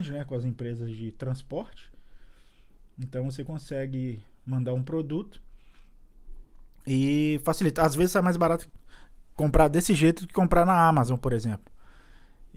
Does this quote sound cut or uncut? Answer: uncut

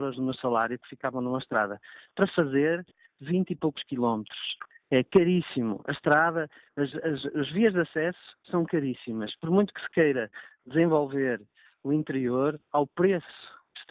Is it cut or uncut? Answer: uncut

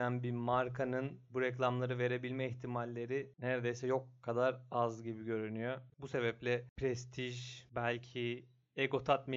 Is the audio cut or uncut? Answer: cut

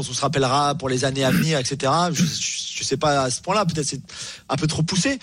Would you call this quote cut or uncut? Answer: uncut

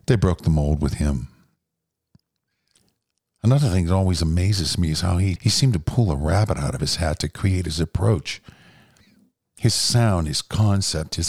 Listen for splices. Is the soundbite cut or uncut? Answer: cut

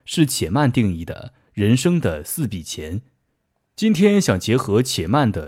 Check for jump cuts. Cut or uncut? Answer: uncut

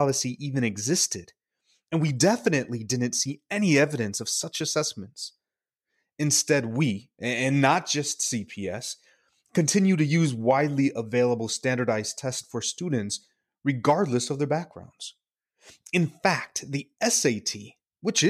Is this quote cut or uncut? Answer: uncut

